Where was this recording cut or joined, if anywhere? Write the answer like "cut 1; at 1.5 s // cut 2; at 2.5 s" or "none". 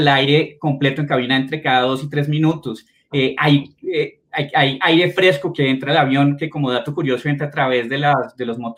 none

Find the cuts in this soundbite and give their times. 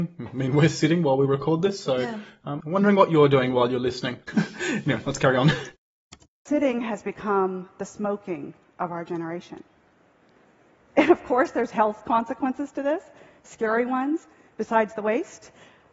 cut 1; at 4.3 s

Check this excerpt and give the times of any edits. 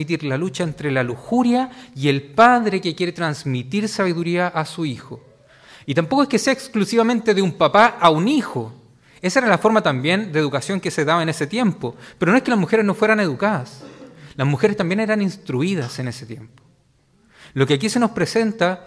none

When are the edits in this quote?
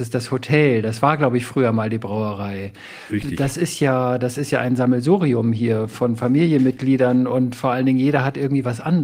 none

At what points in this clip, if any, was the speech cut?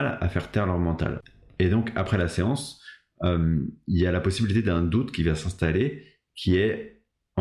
none

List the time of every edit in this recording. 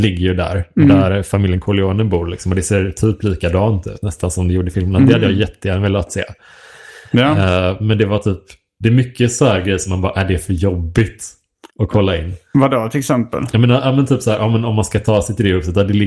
cut 1; at 11.7 s

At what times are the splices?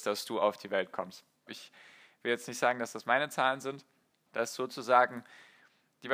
cut 1; at 1.5 s // cut 2; at 4.3 s

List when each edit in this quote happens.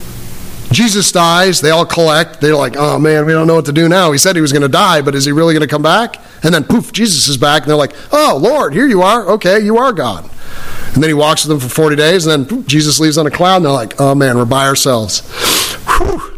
none

